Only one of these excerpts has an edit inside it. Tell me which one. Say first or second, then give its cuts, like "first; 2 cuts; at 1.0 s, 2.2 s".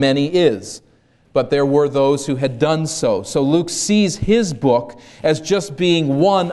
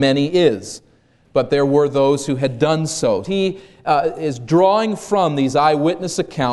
second; 1 cut; at 3.2 s